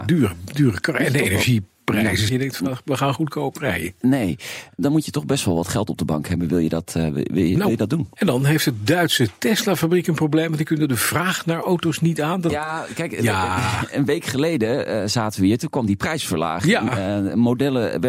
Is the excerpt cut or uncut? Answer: cut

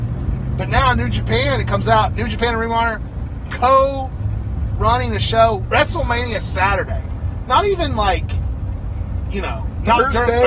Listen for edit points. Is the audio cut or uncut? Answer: uncut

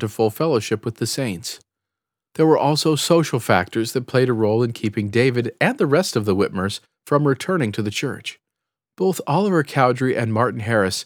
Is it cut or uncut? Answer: uncut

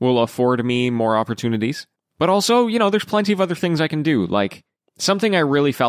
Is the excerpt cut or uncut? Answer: uncut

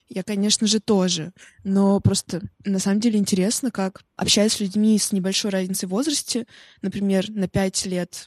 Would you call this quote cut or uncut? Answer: uncut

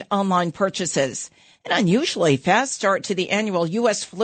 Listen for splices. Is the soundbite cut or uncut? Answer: uncut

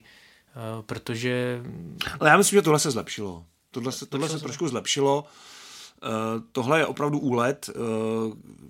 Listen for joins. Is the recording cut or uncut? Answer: uncut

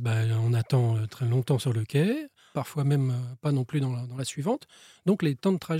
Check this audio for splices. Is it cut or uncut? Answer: cut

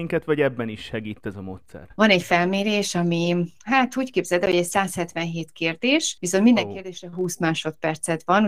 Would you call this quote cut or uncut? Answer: cut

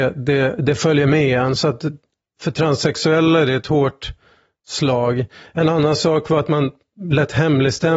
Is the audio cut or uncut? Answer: uncut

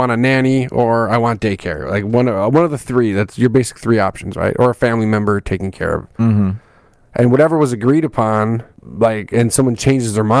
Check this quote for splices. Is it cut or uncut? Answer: uncut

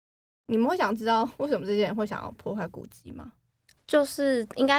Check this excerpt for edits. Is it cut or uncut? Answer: cut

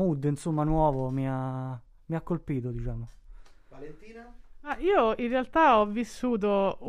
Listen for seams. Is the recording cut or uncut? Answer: uncut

